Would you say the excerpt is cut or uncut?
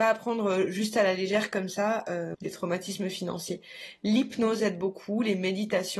cut